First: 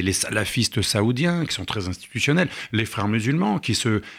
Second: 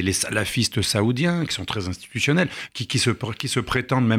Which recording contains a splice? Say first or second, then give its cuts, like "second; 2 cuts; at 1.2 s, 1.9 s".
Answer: second; 1 cut; at 2.7 s